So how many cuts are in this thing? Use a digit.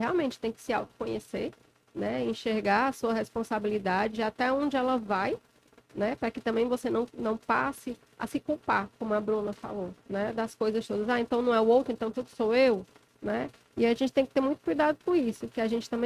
0